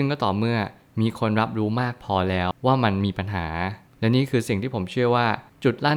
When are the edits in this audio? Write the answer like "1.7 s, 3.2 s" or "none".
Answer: 2.5 s